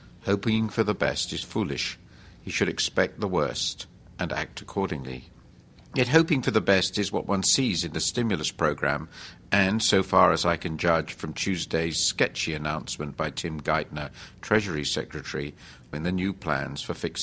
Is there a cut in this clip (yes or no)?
yes